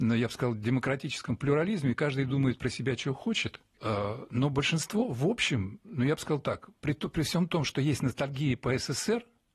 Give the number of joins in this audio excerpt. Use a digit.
1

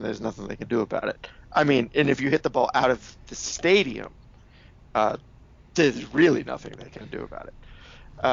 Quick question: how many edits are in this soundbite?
0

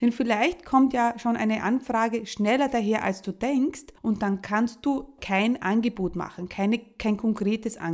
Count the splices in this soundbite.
2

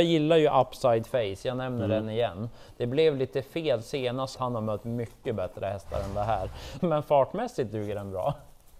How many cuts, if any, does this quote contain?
2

